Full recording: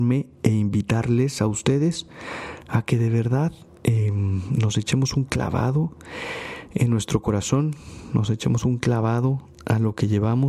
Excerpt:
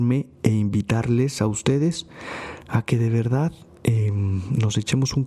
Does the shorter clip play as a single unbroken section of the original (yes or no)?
yes